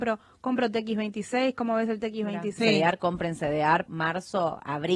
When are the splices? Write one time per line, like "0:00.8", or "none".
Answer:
0:02.6
0:03.9